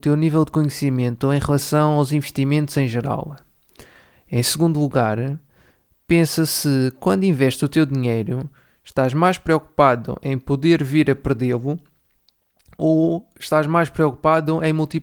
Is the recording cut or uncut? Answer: uncut